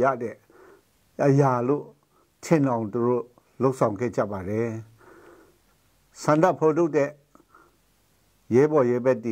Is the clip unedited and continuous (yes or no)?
yes